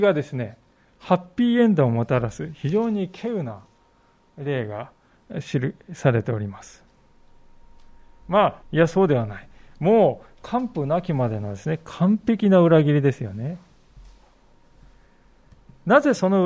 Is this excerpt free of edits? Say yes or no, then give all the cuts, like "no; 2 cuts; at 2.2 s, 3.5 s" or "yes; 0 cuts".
no; 1 cut; at 8.6 s